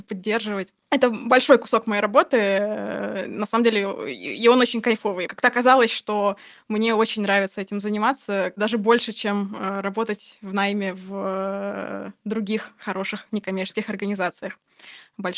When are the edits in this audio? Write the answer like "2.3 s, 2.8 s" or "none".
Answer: none